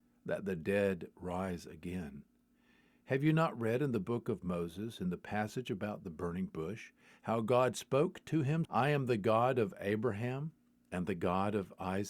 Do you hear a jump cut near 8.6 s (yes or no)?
yes